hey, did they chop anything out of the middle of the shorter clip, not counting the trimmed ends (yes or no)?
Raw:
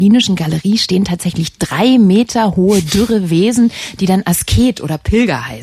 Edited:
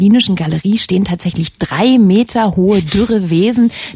no